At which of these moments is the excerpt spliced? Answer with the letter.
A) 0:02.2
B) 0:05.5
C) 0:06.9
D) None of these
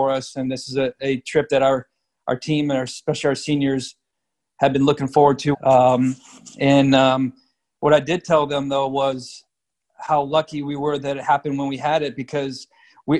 B